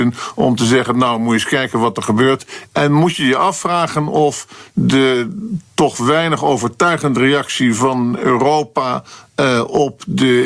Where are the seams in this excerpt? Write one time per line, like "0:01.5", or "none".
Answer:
0:02.7